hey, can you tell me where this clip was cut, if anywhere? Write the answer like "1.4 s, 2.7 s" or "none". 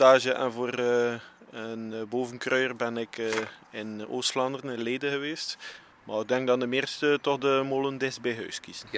none